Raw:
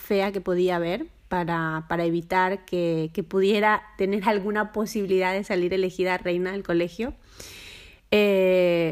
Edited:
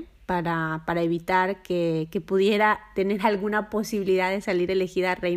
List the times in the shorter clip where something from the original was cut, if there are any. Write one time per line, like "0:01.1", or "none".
none